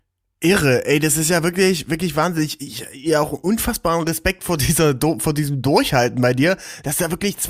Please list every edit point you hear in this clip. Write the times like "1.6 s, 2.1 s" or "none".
none